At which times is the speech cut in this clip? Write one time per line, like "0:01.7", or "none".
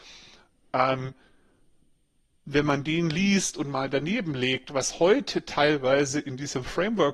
none